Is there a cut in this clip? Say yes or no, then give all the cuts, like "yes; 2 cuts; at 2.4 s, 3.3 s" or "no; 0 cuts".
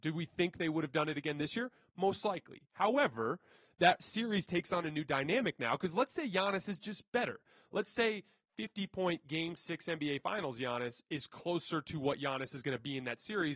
no; 0 cuts